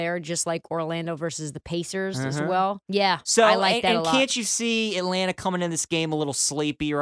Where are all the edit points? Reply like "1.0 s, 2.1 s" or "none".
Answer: 2.9 s